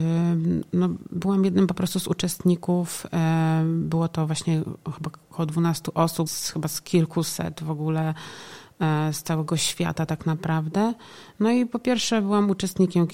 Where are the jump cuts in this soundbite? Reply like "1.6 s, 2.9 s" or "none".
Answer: 6.3 s